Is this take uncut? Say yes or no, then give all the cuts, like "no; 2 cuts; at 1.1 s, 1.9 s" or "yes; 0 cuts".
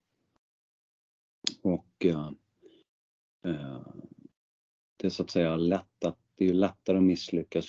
yes; 0 cuts